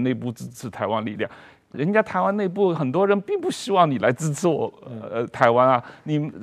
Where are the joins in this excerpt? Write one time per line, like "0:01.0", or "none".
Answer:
0:01.7